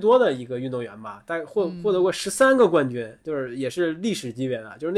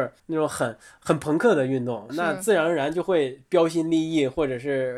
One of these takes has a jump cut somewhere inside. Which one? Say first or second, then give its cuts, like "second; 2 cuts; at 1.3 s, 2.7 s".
second; 1 cut; at 2.1 s